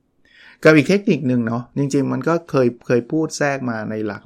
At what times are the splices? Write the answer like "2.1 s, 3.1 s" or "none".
none